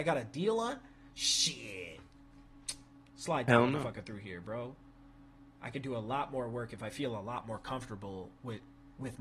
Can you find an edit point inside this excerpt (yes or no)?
no